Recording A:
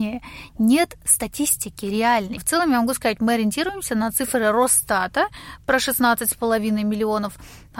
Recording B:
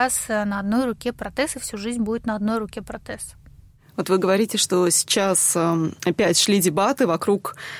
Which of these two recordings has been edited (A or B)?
B